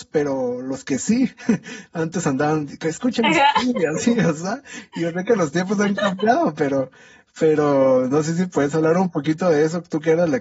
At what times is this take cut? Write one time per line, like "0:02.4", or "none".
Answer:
none